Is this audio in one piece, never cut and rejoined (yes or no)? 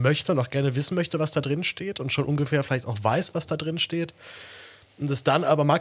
yes